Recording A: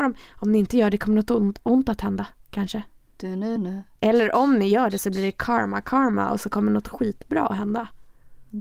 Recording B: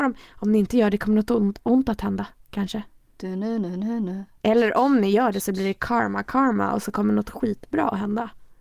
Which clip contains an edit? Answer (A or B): A